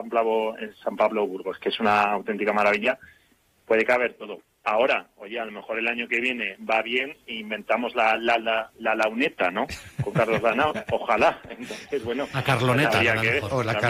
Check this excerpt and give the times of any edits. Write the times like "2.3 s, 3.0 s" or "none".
none